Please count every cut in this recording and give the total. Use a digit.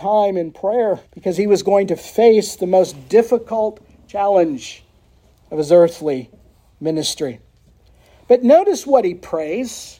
1